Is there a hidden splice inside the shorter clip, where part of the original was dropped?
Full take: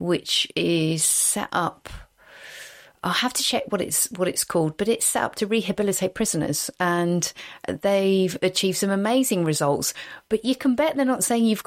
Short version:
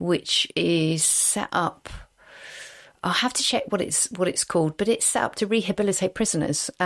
no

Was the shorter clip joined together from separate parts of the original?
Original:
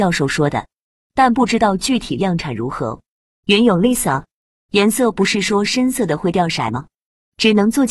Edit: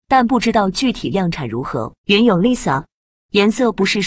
yes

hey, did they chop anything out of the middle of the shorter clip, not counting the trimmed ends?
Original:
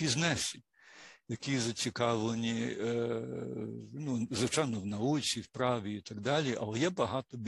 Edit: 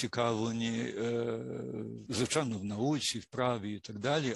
yes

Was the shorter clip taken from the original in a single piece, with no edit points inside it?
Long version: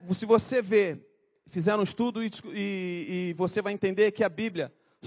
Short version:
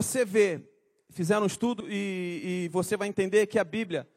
no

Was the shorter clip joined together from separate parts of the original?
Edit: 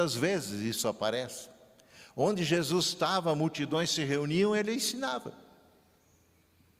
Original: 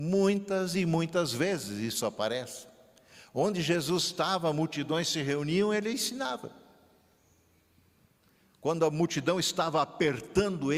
no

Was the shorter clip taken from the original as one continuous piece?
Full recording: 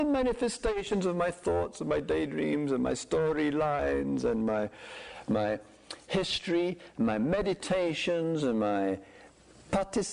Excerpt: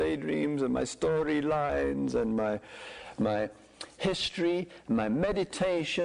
yes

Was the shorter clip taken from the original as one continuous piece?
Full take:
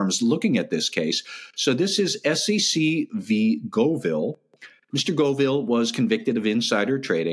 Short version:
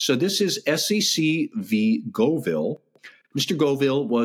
yes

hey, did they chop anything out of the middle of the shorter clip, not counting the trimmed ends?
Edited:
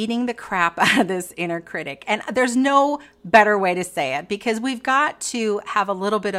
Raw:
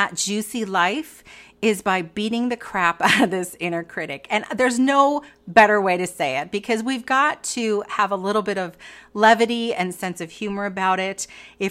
no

